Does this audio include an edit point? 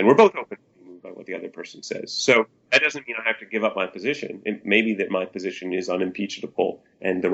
no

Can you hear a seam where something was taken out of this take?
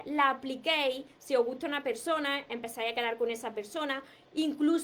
no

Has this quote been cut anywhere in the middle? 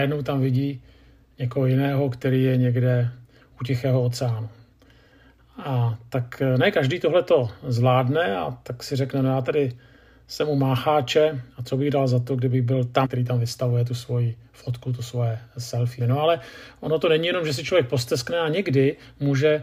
yes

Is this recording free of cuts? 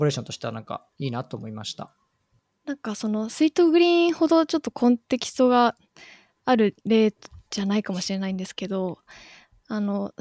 yes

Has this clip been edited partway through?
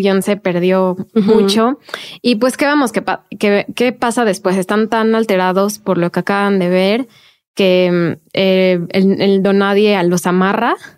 no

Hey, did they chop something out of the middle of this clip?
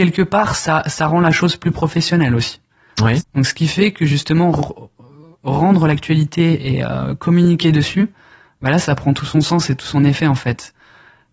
yes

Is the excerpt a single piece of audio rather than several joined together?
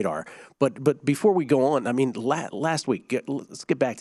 yes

